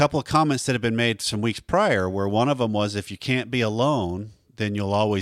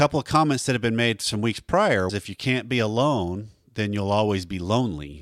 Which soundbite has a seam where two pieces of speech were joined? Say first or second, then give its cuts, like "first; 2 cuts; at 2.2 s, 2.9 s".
second; 1 cut; at 2.1 s